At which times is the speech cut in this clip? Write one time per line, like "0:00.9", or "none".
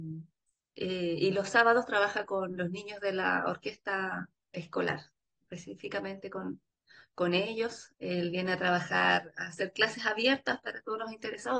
0:07.9